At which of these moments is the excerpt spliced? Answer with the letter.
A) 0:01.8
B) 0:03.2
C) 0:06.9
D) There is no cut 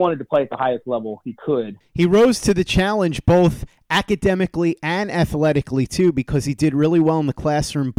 A